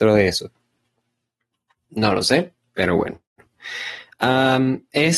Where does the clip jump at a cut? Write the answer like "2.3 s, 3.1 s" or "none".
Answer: none